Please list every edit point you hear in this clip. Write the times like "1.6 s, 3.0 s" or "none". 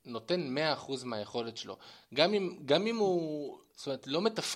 none